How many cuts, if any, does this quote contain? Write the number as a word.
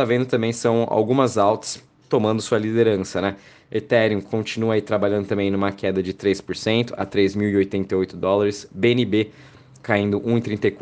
zero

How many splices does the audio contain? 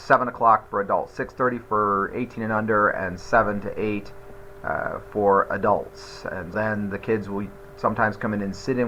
one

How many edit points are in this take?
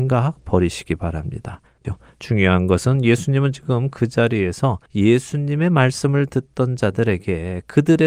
two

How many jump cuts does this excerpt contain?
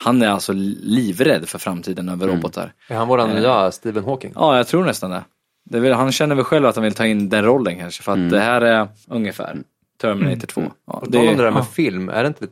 one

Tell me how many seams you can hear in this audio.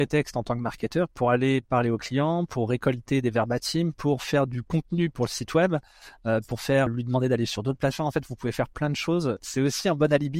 one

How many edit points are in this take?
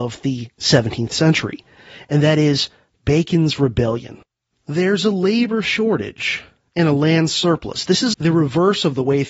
two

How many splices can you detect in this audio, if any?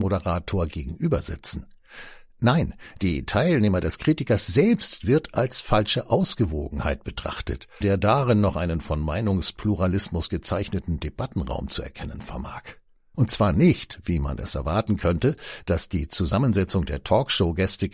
two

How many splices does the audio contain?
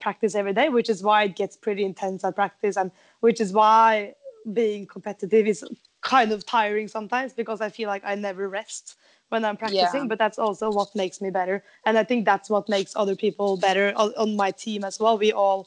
zero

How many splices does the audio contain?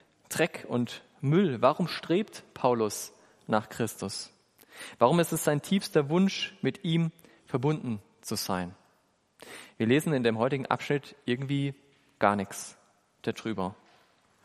zero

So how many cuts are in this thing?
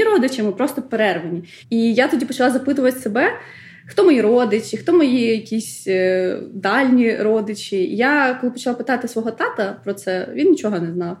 one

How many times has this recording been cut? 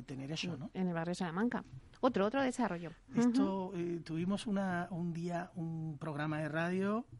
one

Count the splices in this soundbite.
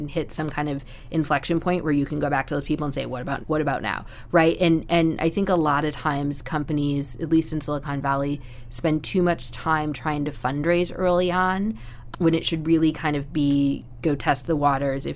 two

